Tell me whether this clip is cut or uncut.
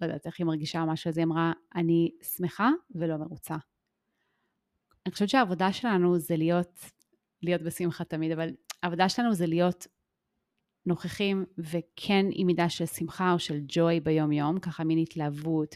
uncut